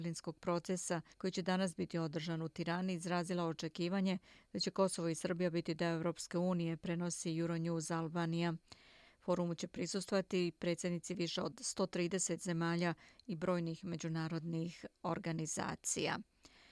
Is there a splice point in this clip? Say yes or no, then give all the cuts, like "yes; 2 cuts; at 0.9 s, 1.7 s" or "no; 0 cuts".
yes; 2 cuts; at 1.1 s, 9.1 s